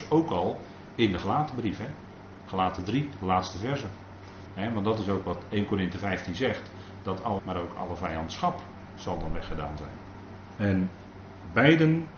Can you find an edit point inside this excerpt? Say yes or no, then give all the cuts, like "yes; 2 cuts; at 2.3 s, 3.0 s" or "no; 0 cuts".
yes; 3 cuts; at 4.5 s, 7.4 s, 10.6 s